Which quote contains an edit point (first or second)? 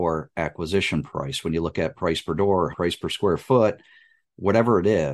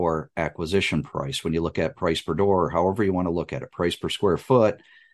first